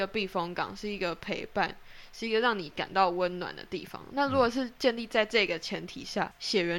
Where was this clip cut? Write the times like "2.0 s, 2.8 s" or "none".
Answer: none